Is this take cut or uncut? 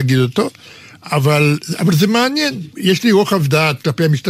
uncut